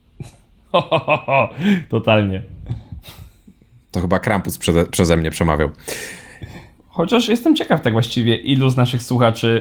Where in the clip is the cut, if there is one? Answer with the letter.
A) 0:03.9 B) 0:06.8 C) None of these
B